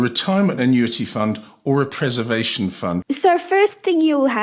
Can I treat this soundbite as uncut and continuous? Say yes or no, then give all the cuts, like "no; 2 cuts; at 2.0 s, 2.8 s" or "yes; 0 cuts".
no; 1 cut; at 3.0 s